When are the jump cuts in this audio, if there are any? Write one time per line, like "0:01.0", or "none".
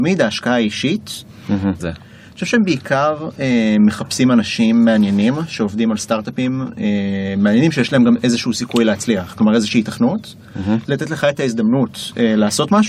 0:01.8
0:10.9